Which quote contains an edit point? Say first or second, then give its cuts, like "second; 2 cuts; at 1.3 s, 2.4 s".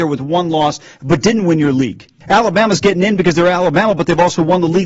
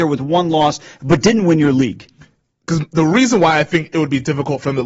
first; 1 cut; at 2.2 s